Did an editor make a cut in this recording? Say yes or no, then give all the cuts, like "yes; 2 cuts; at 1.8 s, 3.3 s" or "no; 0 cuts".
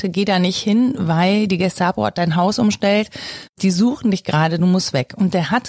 no; 0 cuts